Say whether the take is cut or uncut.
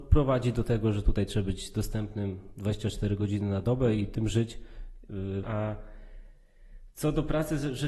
cut